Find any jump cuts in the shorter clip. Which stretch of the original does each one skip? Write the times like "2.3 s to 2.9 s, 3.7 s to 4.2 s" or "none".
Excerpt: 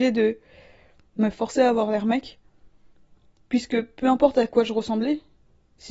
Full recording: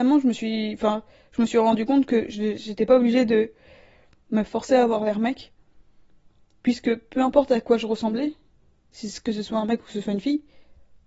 none